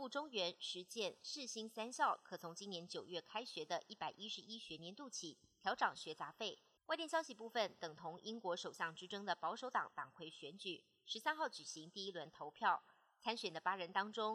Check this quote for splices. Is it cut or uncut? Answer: cut